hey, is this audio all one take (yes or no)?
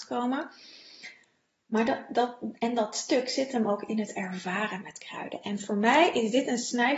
yes